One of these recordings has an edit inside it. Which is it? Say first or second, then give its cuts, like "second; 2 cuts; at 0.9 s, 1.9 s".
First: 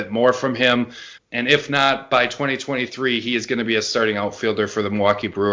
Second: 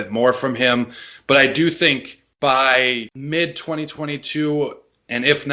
first; 1 cut; at 1.2 s